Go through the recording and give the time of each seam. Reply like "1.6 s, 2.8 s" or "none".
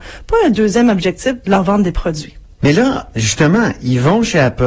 2.6 s